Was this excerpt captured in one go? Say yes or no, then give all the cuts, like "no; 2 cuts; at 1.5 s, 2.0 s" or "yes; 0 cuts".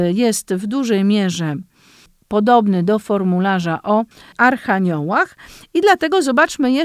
yes; 0 cuts